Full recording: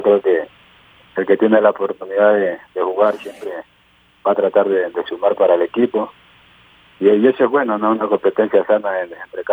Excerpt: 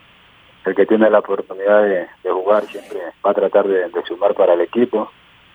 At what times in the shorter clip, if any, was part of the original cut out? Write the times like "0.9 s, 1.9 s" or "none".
3.2 s